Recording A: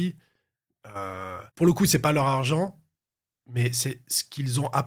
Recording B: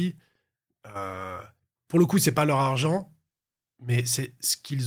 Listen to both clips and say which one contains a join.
A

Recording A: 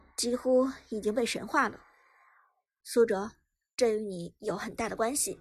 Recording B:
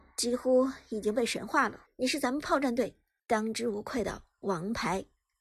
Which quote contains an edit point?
B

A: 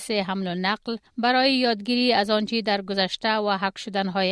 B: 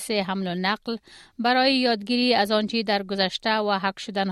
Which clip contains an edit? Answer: A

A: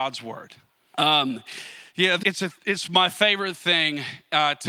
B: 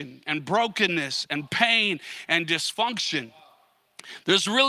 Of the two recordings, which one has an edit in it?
A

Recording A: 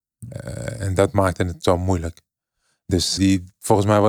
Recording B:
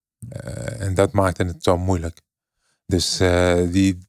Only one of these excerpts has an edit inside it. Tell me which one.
A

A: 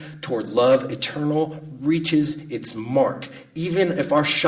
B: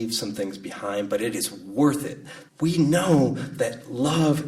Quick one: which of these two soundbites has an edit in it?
B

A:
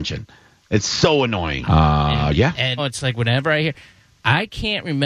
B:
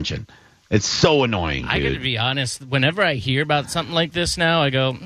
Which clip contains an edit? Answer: A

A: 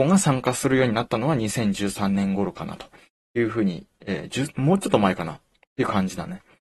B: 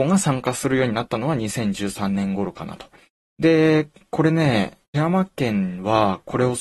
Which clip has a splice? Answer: B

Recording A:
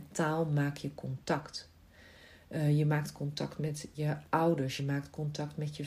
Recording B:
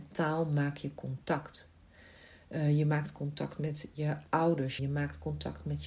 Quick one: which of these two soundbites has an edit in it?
B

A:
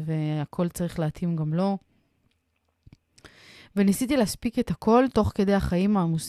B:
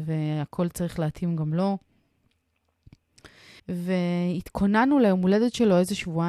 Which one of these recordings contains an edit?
B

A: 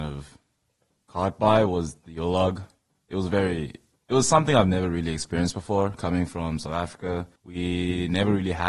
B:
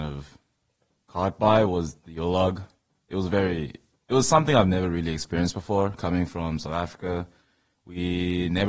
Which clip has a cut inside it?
A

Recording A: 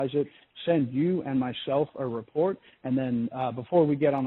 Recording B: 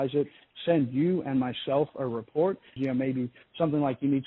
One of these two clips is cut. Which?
B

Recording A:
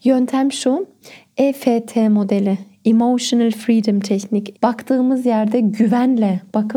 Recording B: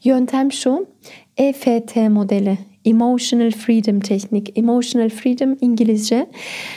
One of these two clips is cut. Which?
A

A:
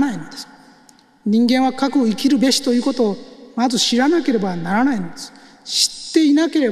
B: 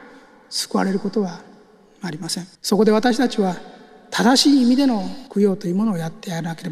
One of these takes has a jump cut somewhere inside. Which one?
B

